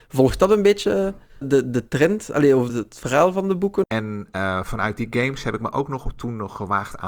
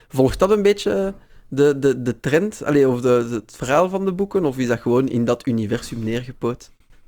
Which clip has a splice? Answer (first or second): first